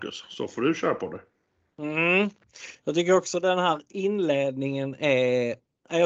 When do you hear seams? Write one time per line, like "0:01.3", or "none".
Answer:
none